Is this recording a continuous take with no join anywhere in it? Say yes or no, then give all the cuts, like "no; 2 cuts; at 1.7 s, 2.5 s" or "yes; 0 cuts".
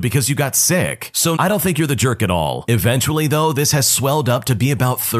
no; 2 cuts; at 1.4 s, 2.7 s